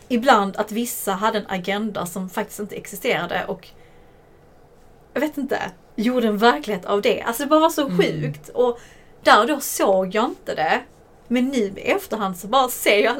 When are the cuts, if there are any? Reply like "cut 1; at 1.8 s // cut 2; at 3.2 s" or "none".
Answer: none

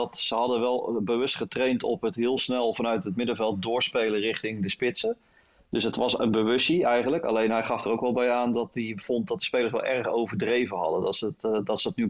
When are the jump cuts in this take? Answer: none

